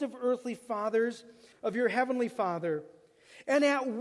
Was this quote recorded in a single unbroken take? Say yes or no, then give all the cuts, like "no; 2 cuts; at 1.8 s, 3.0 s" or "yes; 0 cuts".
no; 1 cut; at 1.5 s